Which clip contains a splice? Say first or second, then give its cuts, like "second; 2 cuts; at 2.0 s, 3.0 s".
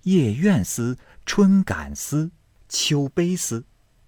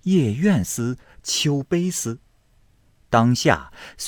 second; 2 cuts; at 1.2 s, 3.0 s